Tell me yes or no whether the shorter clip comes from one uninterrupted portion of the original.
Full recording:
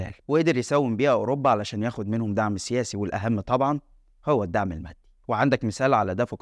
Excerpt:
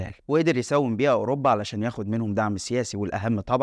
yes